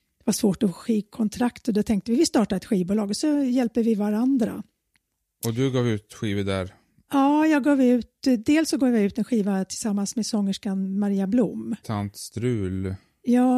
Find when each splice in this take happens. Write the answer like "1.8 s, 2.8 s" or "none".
11.8 s

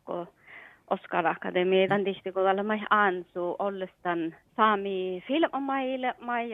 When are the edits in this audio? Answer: 1.9 s, 4.5 s

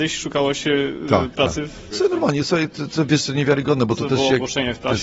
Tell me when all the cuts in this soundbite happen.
1.9 s

